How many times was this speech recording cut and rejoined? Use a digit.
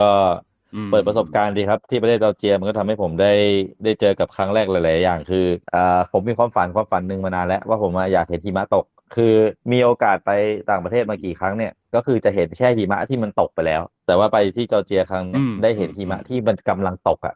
3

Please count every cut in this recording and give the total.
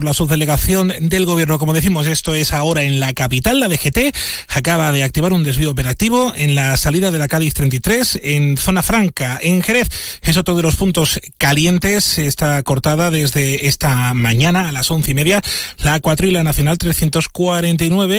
0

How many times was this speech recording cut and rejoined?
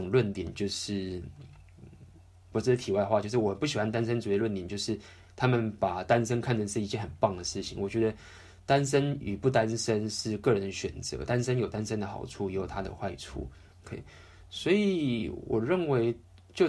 1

